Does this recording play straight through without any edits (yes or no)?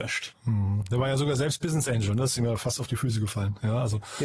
yes